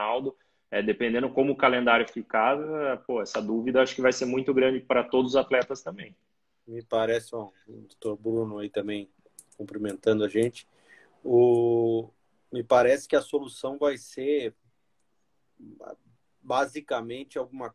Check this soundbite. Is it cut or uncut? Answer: uncut